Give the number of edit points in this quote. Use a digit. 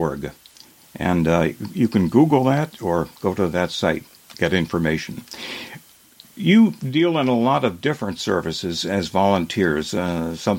0